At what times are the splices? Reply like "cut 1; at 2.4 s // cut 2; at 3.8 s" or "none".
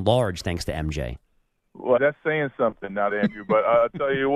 cut 1; at 2.0 s // cut 2; at 3.1 s